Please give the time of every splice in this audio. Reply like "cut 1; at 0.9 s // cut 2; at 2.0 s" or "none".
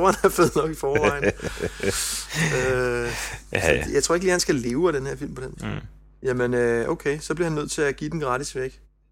cut 1; at 5.5 s